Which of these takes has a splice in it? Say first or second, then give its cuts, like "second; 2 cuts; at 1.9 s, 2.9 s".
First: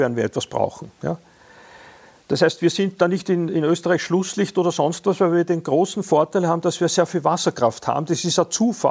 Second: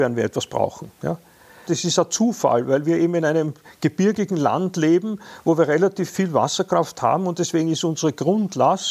second; 1 cut; at 1.7 s